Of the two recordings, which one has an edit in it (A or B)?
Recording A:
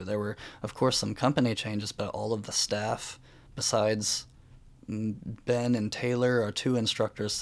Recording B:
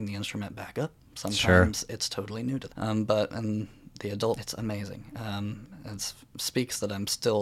B